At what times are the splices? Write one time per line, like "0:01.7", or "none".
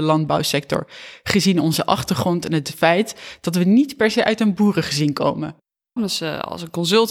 0:06.0

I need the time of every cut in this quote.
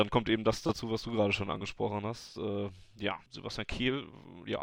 0:03.3

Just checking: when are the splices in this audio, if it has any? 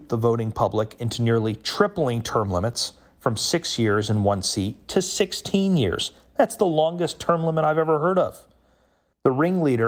none

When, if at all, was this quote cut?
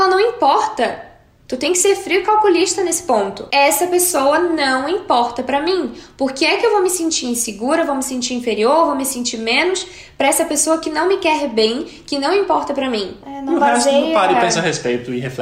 0:13.2

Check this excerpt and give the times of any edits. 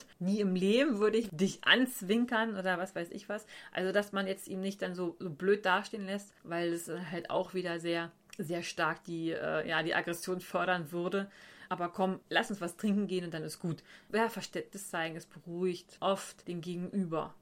0:11.7

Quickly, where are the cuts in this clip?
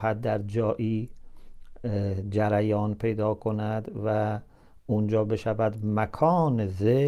none

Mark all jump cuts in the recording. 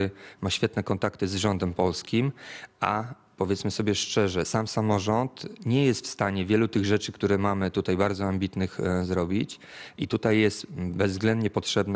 none

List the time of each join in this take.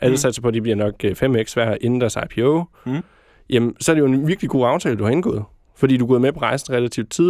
none

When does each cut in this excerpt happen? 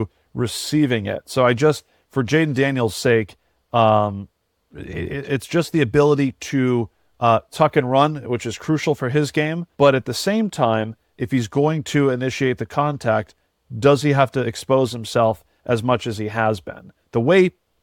0:09.7

